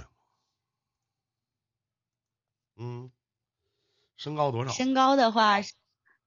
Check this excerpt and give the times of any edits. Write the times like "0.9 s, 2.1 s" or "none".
2.7 s